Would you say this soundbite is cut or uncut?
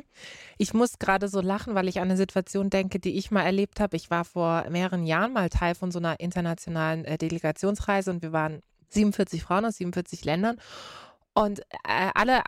uncut